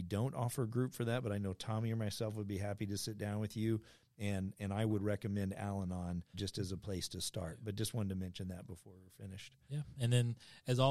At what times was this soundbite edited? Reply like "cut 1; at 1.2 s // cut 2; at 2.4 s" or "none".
cut 1; at 6.3 s